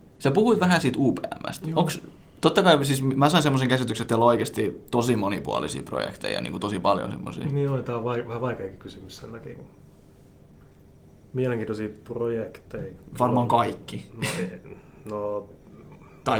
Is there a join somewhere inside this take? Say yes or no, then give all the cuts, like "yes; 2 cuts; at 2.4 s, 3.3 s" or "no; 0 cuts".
no; 0 cuts